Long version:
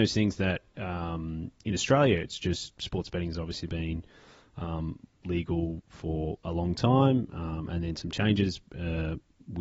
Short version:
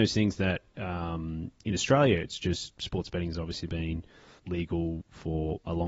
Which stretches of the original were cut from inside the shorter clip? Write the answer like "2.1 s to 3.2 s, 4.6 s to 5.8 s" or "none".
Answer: 4.4 s to 5.1 s